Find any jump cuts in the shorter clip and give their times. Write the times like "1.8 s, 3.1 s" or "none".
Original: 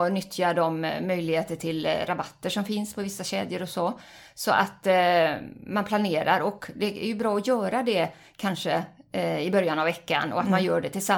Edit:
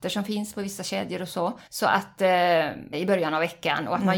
1.7 s, 2.9 s